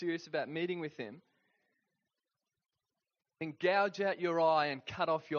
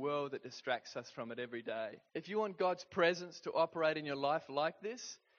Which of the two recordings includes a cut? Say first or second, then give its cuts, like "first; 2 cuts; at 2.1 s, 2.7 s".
second; 1 cut; at 2.1 s